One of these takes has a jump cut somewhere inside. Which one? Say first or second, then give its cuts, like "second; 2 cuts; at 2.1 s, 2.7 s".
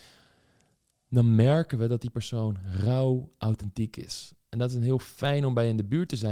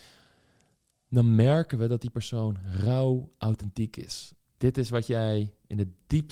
second; 1 cut; at 4.4 s